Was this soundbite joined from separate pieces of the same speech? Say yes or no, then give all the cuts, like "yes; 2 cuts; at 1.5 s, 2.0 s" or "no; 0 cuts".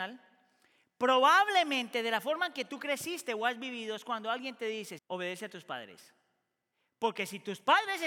yes; 1 cut; at 5.0 s